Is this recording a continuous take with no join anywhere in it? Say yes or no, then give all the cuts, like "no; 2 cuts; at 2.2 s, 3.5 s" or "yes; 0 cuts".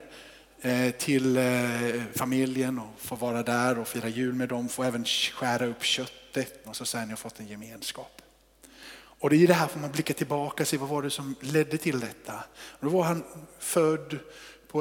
no; 1 cut; at 6.6 s